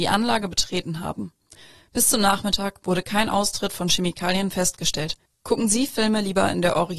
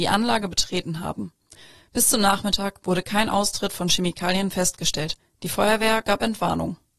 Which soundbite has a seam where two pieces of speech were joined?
first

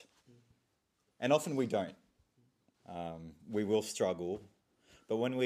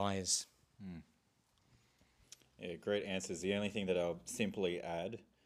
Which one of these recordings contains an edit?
first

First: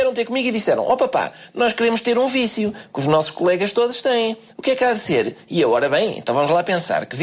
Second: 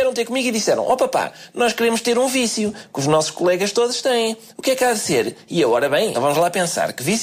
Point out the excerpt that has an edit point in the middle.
second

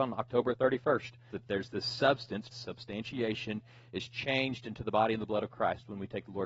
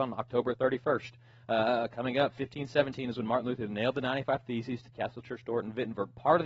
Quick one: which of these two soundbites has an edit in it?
first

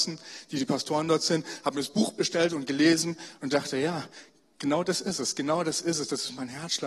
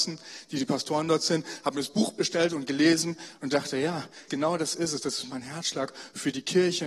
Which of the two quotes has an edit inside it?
second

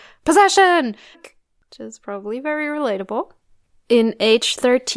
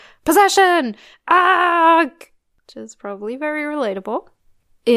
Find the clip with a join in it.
first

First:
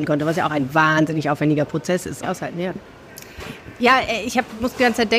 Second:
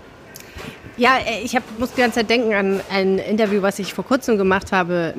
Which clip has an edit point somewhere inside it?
first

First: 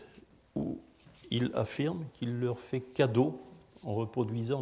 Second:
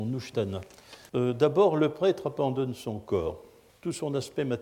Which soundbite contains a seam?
second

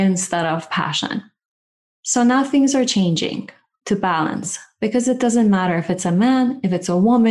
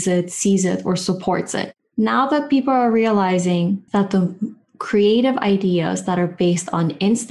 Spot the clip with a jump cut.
second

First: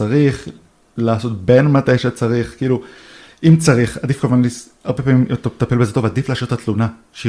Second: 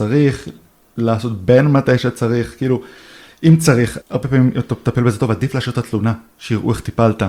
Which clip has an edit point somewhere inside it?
second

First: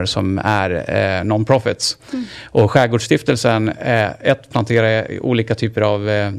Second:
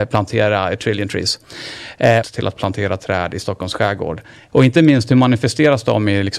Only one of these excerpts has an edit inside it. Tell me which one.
second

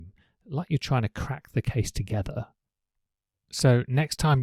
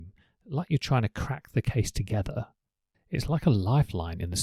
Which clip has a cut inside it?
second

